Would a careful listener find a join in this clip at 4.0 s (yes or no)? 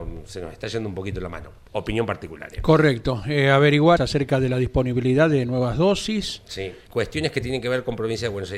yes